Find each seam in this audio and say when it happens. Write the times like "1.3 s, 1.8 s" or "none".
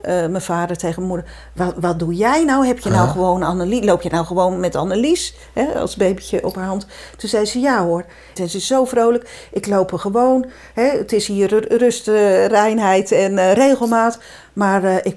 8.4 s